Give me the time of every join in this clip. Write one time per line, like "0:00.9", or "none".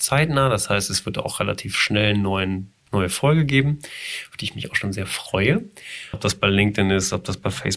0:06.1

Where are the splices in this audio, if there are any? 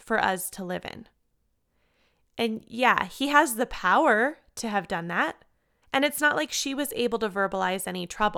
0:05.8

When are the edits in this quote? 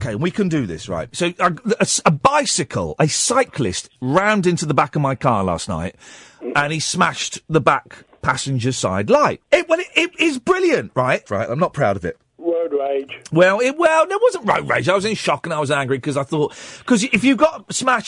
0:09.4
0:11.3

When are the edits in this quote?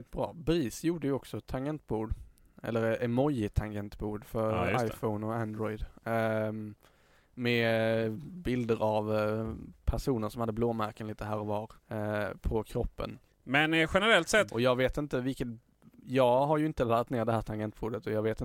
0:11.8
0:13.3
0:14.5

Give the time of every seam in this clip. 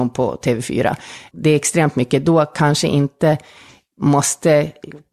0:01.3

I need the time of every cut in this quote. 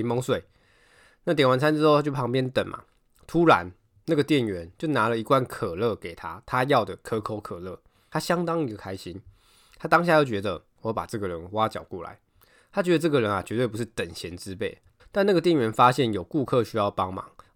0:15.0

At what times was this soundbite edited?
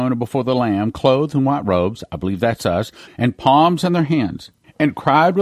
0:03.1

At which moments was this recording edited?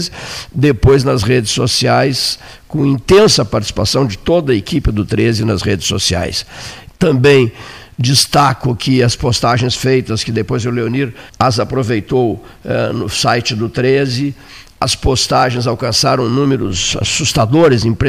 0:06.9
0:11.3

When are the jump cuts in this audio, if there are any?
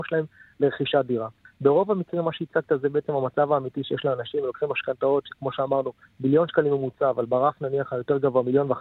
0:01.4

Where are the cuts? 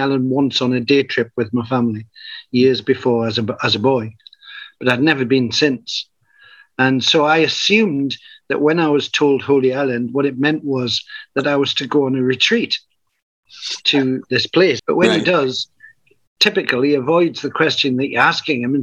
0:14.8

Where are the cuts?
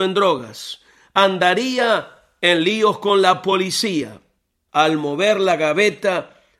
0:04.7

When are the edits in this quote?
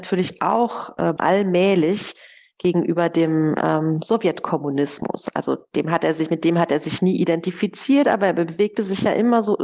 0:01.2

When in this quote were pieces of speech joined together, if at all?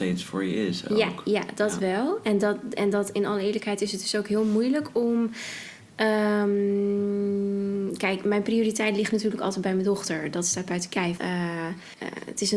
0:11.2

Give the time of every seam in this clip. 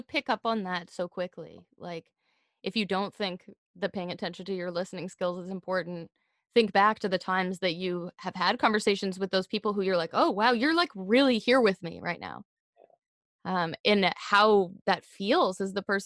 none

